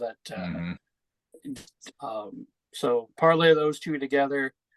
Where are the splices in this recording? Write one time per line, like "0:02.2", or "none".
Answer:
0:01.9